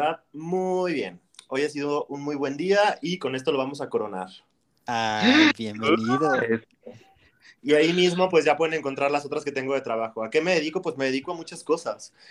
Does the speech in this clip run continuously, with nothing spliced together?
no; 1 cut; at 7.6 s

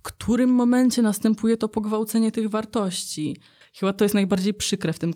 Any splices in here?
yes; 1 cut; at 3.6 s

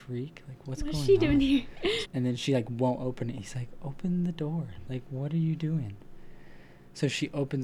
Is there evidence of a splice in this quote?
yes; 1 cut; at 2.0 s

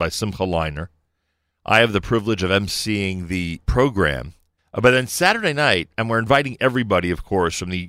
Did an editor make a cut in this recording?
yes; 1 cut; at 4.6 s

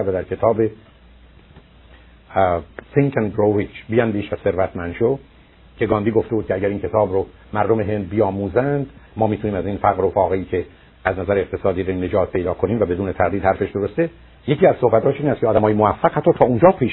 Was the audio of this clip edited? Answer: no; 0 cuts

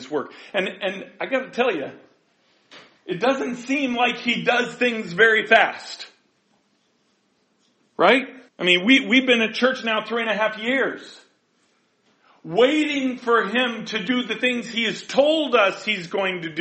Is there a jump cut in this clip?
yes; 1 cut; at 8.5 s

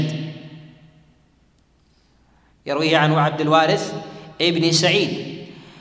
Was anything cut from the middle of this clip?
no; 0 cuts

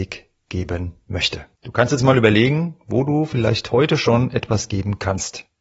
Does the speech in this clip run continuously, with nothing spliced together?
no; 1 cut; at 1.6 s

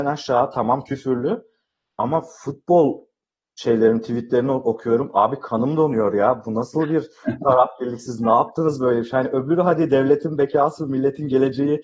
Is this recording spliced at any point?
no; 0 cuts

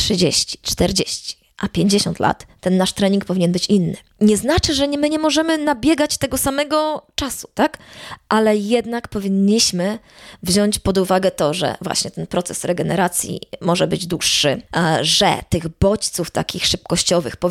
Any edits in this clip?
no; 0 cuts

